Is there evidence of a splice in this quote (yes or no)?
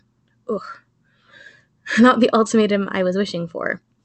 no